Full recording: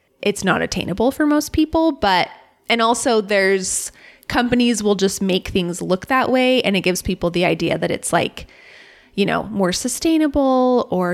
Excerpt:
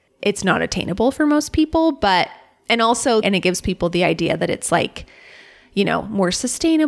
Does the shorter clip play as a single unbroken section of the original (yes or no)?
no